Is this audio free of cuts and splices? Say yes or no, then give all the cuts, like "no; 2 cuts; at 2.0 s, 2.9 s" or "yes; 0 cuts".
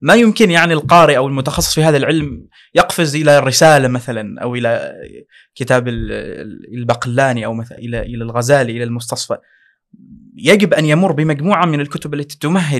no; 1 cut; at 7.8 s